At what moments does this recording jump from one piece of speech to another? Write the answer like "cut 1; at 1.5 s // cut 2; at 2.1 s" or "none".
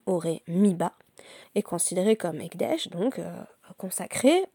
cut 1; at 1.4 s

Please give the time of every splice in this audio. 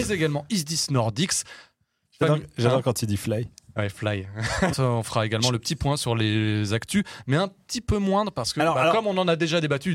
cut 1; at 4.7 s

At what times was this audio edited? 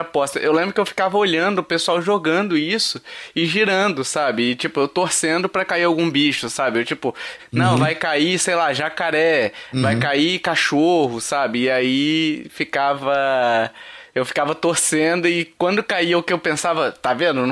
cut 1; at 7.4 s

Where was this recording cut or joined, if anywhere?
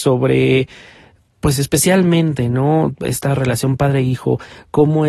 none

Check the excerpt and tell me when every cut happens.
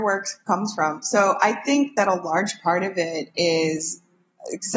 none

